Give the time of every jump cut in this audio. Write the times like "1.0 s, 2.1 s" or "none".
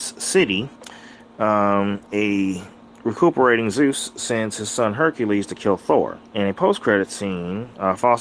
6.3 s